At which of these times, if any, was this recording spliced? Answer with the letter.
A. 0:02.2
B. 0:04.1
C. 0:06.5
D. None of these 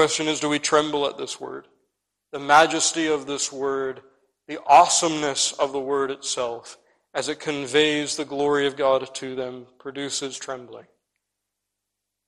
A